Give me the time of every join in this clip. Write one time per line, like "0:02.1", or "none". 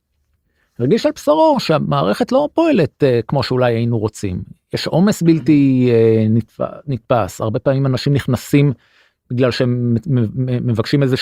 none

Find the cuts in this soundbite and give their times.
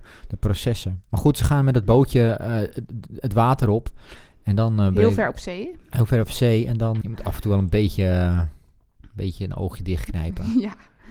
0:07.0

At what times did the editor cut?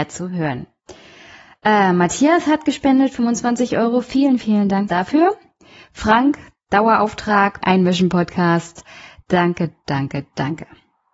0:04.9
0:07.6

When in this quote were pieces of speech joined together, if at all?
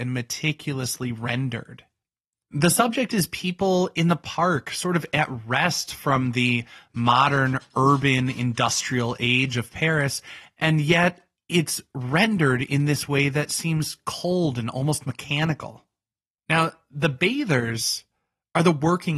0:16.4

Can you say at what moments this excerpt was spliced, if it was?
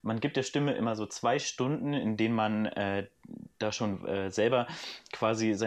none

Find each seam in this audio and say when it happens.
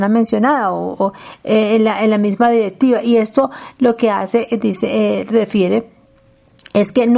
none

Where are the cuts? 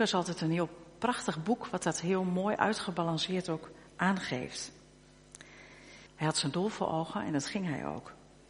0:06.1

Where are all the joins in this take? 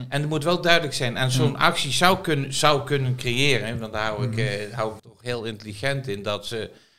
0:05.0

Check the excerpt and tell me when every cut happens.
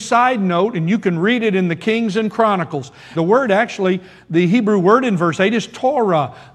0:03.1

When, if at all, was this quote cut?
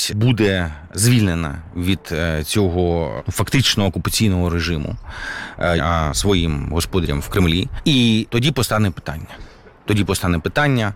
0:05.8

